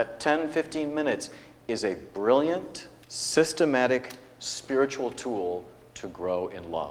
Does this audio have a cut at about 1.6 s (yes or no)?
no